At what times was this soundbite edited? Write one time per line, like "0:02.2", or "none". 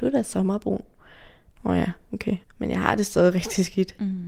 none